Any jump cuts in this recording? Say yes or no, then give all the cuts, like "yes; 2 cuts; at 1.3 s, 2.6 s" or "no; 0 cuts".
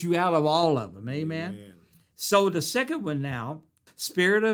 no; 0 cuts